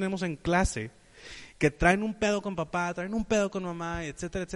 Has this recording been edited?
no; 0 cuts

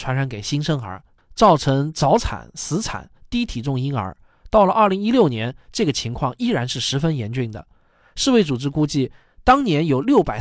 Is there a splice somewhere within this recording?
no; 0 cuts

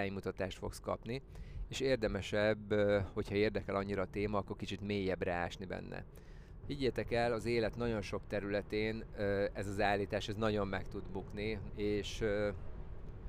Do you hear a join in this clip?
yes; 2 cuts; at 6.6 s, 11.7 s

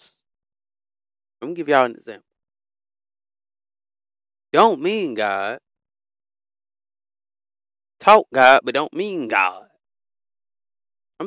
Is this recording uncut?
yes; 0 cuts

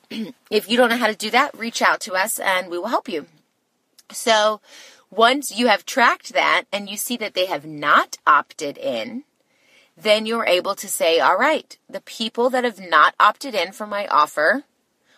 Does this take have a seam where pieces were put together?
no; 0 cuts

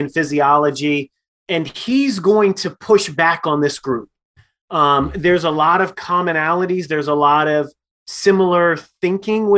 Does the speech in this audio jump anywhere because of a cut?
no; 0 cuts

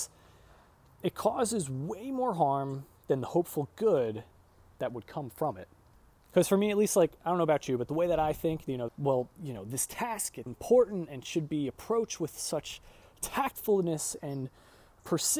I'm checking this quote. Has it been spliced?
yes; 2 cuts; at 8.9 s, 10.5 s

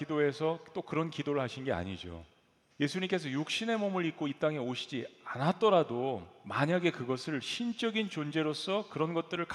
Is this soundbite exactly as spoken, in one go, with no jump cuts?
no; 1 cut; at 2.7 s

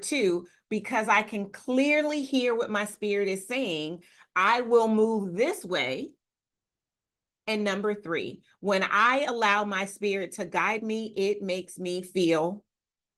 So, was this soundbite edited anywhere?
no; 0 cuts

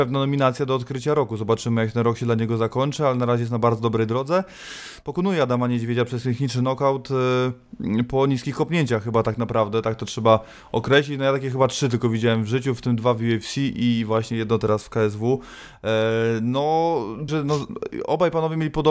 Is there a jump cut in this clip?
yes; 1 cut; at 17.3 s

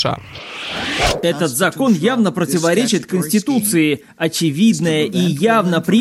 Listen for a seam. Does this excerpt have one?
no; 0 cuts

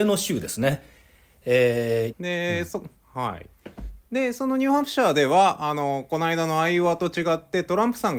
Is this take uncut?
no; 1 cut; at 2.1 s

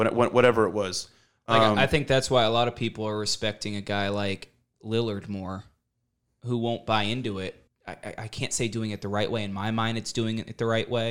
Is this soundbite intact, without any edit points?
no; 1 cut; at 7.7 s

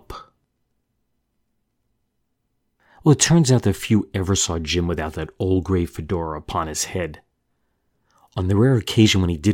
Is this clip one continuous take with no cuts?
yes; 0 cuts

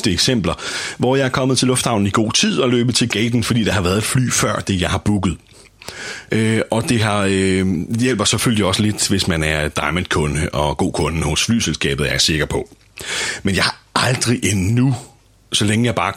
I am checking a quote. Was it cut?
yes; 1 cut; at 6.3 s

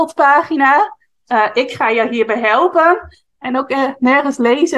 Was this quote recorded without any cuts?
no; 2 cuts; at 1.3 s, 3.4 s

